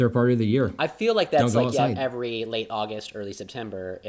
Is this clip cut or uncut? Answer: uncut